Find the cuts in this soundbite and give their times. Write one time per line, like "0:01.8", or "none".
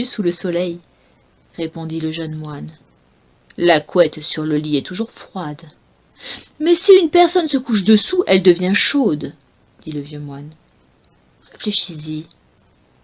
none